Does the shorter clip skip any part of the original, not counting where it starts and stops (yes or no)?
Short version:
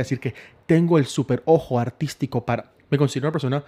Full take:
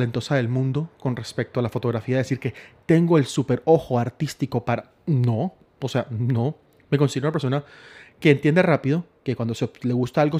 yes